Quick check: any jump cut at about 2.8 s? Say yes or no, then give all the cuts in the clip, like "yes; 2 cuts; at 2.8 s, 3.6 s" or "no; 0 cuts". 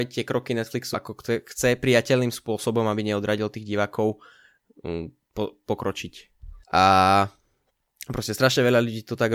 no; 2 cuts; at 0.9 s, 6.6 s